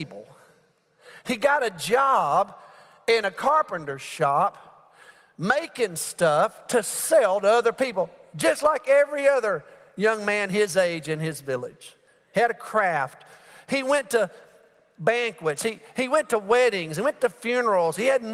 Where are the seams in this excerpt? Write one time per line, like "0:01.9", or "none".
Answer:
none